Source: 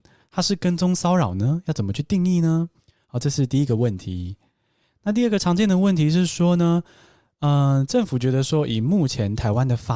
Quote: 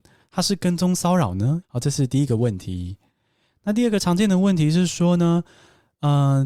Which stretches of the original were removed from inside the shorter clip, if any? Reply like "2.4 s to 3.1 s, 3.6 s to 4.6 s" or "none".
1.6 s to 3.0 s